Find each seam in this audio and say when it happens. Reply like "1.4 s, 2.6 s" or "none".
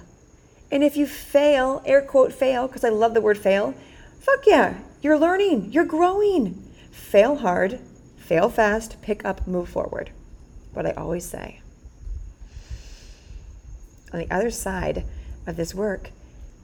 14.1 s